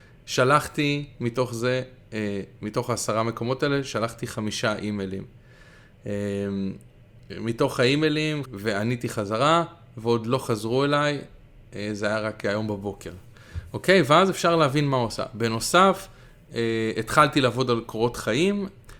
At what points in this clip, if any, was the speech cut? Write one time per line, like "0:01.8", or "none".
0:08.4